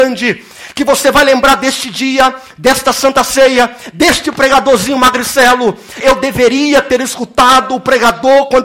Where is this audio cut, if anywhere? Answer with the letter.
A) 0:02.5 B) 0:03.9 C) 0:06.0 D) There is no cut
C